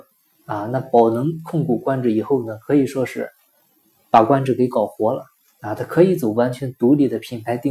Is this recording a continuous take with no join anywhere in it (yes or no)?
yes